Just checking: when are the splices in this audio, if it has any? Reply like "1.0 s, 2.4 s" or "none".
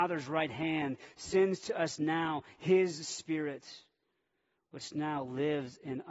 none